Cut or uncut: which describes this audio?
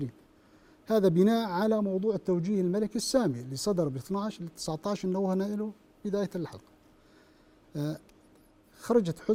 uncut